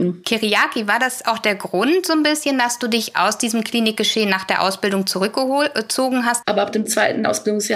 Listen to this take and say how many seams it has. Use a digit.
1